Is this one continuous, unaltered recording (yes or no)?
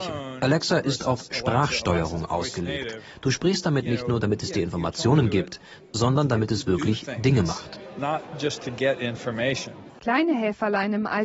yes